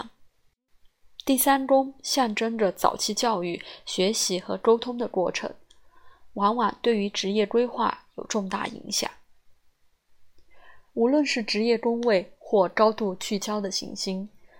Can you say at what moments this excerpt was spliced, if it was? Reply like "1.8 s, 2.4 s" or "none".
10.8 s